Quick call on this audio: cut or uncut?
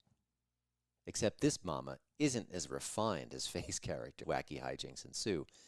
cut